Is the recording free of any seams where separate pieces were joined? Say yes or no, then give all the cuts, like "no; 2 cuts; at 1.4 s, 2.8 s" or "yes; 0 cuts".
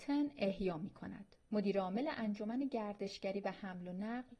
no; 1 cut; at 1.4 s